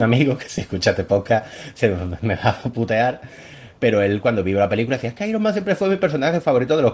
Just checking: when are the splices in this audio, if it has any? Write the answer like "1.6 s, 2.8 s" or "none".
none